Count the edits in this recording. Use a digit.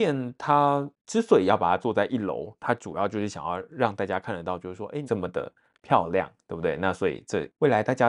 1